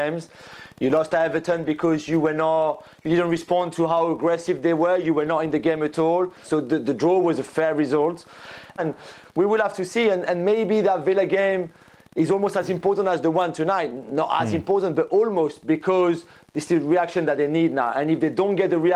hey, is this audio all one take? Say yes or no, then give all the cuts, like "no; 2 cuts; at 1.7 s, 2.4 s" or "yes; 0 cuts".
no; 2 cuts; at 6.4 s, 8.8 s